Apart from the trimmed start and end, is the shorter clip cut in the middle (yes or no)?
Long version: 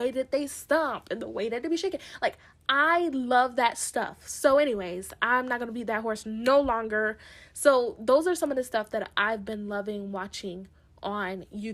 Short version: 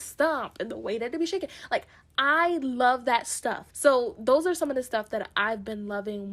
yes